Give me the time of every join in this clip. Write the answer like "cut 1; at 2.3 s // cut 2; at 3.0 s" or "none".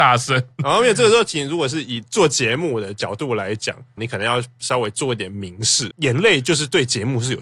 cut 1; at 4.0 s // cut 2; at 5.9 s